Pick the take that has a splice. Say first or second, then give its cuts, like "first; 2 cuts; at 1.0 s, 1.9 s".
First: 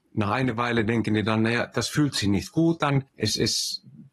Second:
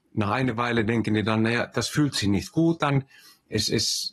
first; 1 cut; at 3.1 s